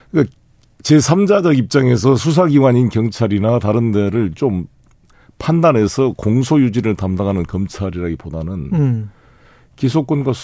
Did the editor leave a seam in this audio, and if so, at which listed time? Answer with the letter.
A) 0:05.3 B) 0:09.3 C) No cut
C